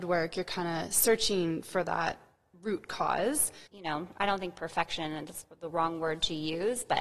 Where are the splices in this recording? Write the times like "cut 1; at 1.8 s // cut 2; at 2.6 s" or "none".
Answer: cut 1; at 3.7 s